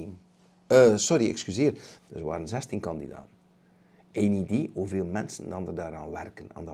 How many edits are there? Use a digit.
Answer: 1